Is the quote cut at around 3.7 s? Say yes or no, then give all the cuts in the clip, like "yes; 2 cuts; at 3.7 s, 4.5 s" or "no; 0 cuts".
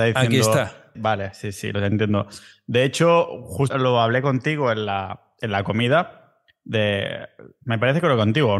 yes; 2 cuts; at 0.9 s, 3.7 s